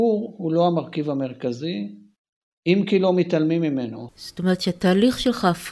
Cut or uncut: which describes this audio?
cut